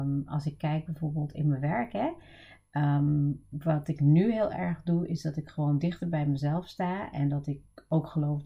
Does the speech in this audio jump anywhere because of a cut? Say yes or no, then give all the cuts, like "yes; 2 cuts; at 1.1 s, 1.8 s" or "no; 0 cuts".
no; 0 cuts